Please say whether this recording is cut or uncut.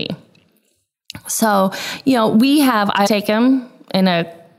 cut